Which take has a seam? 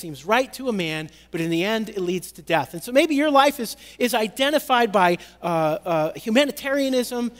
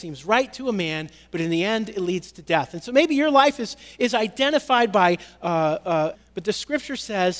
second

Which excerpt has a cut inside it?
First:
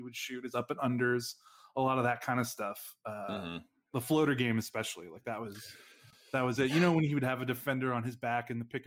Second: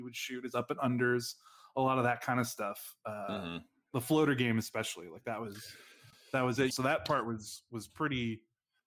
second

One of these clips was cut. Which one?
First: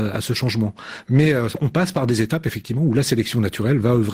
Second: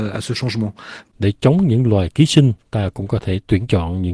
second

